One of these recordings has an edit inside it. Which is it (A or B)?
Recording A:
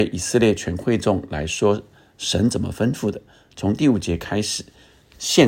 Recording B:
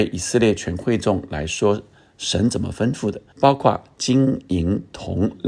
B